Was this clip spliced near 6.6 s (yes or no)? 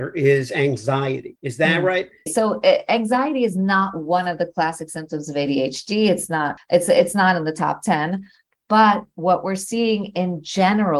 yes